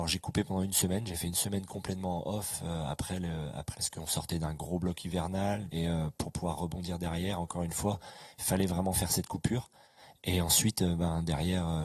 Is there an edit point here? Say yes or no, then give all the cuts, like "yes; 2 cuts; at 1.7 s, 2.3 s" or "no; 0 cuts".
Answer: yes; 2 cuts; at 3.7 s, 5.7 s